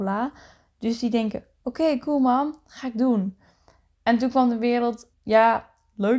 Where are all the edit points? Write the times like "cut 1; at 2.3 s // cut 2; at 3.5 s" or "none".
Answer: cut 1; at 5.1 s